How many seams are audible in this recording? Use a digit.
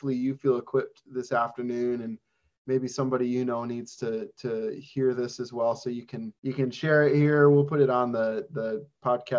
1